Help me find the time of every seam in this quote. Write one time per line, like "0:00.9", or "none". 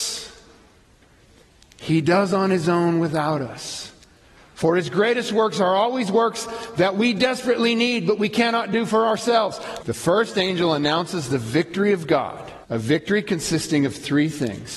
0:09.8
0:12.6